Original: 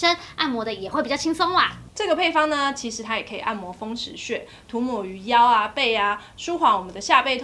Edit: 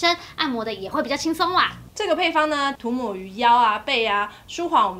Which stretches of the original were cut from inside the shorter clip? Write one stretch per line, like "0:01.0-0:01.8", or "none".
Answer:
0:02.8-0:04.6